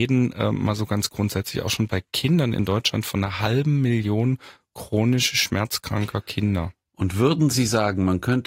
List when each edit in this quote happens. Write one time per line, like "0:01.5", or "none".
none

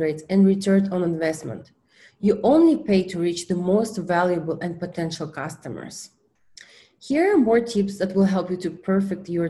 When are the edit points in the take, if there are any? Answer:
none

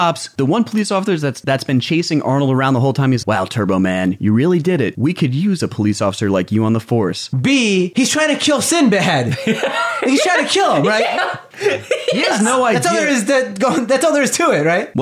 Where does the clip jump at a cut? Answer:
0:03.2
0:07.3

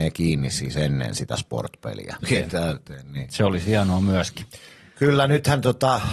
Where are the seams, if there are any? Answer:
0:02.2

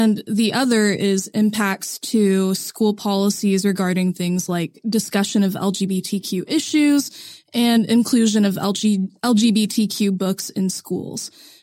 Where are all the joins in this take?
none

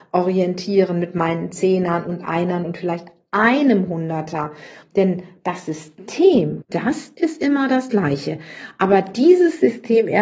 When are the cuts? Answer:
0:04.8
0:06.6

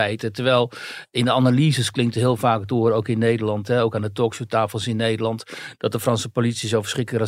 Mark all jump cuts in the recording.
none

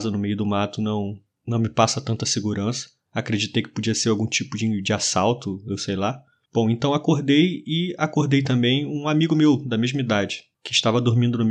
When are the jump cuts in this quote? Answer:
none

